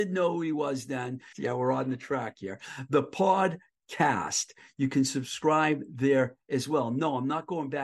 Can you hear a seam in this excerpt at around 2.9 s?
no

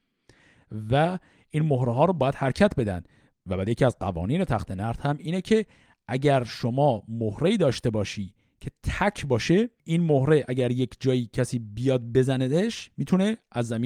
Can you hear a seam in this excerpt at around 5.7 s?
no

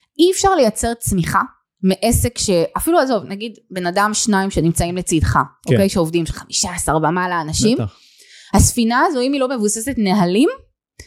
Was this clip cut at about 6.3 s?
yes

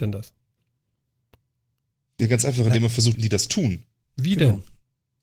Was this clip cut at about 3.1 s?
yes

